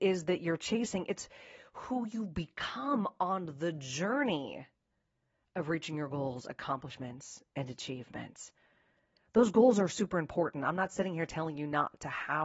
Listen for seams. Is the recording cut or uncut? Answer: uncut